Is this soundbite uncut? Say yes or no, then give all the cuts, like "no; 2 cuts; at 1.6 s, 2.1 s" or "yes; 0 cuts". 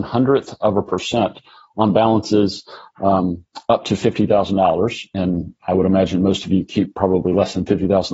yes; 0 cuts